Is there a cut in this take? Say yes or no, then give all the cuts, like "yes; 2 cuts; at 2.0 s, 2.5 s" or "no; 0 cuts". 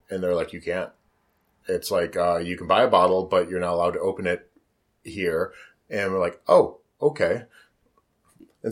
no; 0 cuts